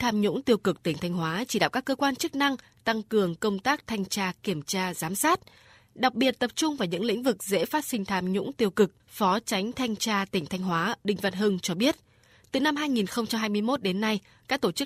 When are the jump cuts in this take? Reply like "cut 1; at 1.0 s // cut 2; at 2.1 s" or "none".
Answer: cut 1; at 9.0 s